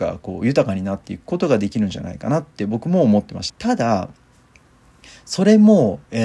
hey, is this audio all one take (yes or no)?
no